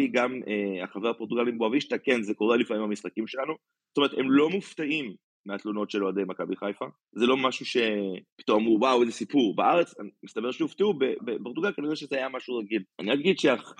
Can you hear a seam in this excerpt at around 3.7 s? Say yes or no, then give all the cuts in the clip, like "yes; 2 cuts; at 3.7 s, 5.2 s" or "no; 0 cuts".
no; 1 cut; at 11.2 s